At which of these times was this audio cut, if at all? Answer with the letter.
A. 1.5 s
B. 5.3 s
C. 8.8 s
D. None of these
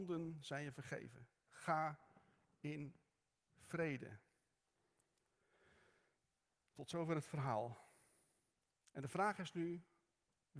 A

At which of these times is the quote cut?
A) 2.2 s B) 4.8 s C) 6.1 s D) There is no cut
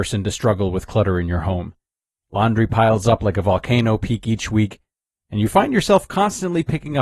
A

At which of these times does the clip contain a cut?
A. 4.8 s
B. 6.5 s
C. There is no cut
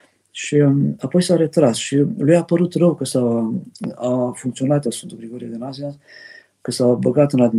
A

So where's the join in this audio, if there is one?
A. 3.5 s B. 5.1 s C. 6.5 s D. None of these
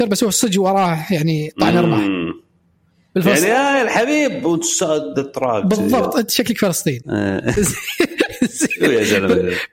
D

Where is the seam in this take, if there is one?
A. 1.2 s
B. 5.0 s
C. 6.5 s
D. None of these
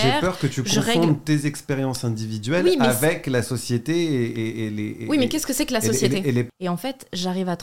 C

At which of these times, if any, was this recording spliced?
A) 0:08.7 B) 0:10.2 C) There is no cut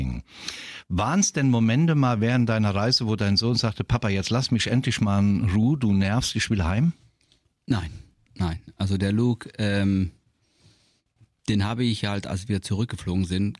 C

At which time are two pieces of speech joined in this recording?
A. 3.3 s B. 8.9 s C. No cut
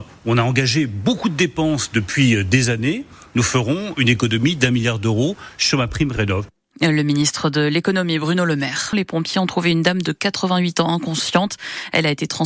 B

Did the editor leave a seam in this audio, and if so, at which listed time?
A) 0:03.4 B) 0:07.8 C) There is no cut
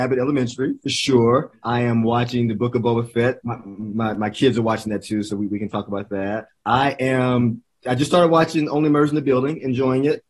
A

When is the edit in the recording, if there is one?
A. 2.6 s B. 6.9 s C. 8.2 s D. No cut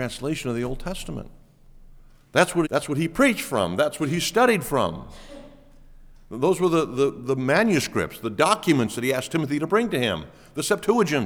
A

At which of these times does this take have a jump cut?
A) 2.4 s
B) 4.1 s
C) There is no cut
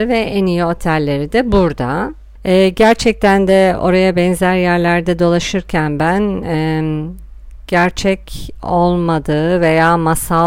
A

